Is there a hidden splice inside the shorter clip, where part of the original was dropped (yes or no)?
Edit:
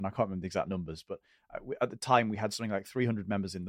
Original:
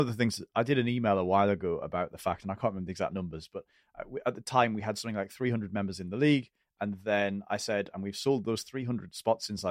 no